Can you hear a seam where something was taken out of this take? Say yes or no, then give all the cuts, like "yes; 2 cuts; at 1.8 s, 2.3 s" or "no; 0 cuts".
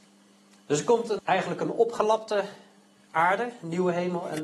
yes; 1 cut; at 1.2 s